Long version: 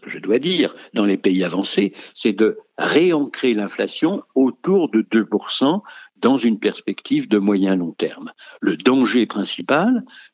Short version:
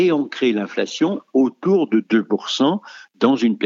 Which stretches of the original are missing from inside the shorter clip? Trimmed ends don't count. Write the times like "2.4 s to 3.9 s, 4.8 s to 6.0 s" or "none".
none